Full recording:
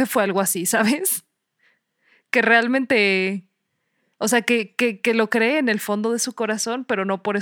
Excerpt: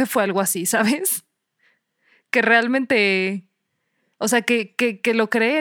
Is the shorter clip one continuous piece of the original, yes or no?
yes